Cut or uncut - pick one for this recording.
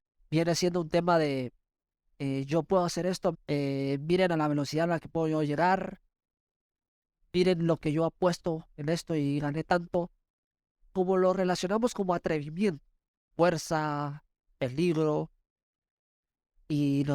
cut